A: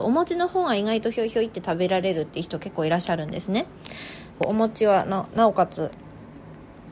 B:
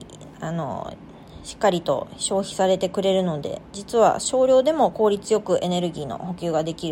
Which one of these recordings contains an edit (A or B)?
A